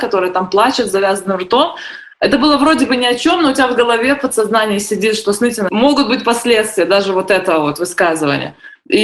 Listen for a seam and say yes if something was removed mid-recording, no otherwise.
no